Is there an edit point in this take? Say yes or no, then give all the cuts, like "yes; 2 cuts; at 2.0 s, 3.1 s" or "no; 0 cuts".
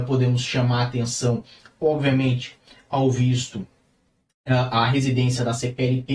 no; 0 cuts